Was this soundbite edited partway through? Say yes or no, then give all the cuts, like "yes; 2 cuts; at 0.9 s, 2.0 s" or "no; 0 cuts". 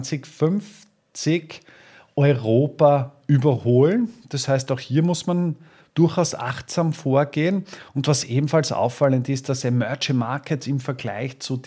no; 0 cuts